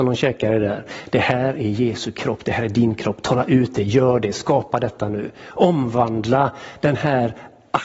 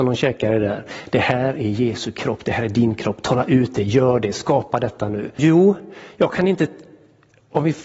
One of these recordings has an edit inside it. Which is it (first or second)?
second